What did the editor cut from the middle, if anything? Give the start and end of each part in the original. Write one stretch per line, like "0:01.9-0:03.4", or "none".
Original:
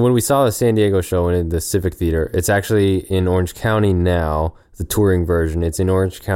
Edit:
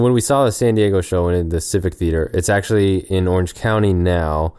none